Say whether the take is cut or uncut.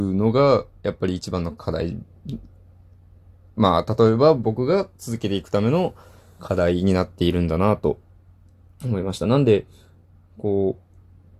uncut